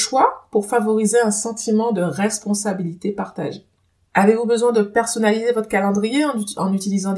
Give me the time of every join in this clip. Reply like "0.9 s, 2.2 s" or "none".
none

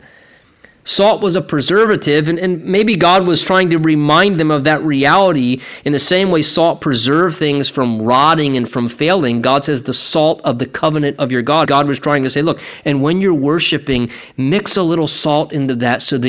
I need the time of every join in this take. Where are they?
11.6 s

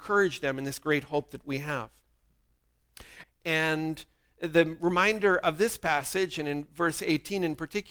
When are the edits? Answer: 3.2 s

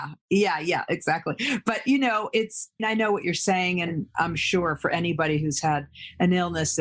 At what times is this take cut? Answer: 2.8 s

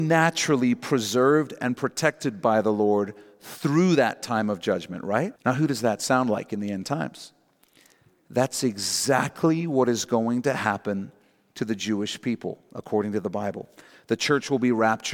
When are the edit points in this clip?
5.4 s

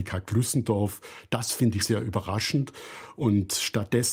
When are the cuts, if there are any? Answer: 1.8 s

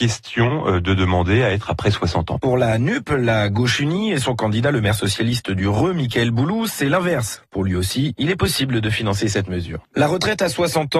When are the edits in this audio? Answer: 7.3 s, 9.8 s

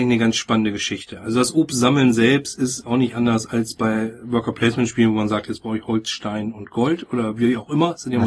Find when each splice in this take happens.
none

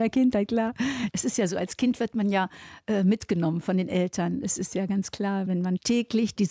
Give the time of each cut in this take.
1.1 s

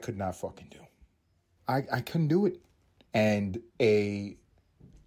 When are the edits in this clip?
1.6 s, 3.1 s

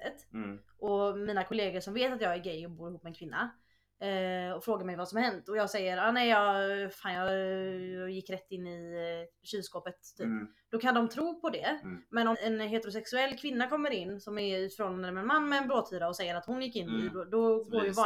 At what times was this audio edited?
12.3 s

